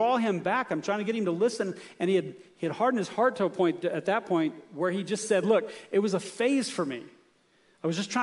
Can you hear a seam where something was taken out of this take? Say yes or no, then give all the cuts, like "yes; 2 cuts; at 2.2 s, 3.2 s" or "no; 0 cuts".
no; 0 cuts